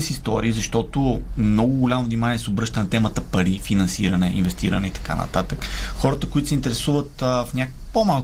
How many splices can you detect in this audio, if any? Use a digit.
0